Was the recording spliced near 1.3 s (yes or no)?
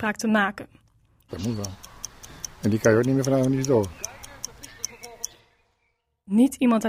yes